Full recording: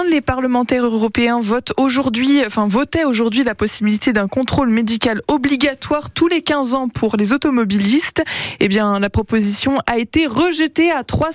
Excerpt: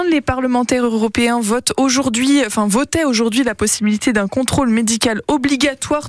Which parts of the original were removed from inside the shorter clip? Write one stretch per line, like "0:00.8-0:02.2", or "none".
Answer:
none